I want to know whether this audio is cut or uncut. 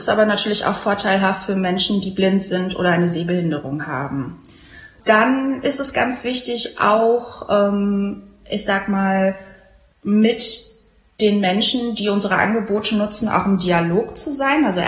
cut